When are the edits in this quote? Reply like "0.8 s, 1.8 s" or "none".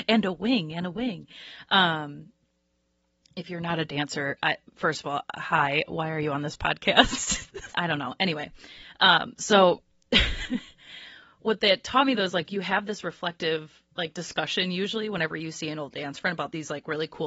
7.7 s

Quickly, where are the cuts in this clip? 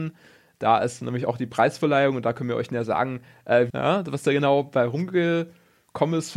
3.7 s

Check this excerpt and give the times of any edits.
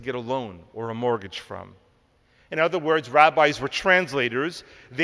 none

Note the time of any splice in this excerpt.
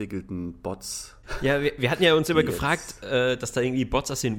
none

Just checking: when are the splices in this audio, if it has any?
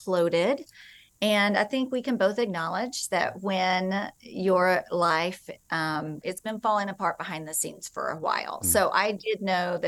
6.2 s

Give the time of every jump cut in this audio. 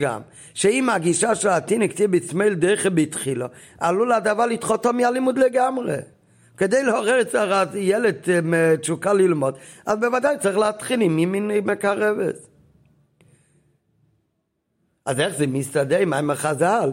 none

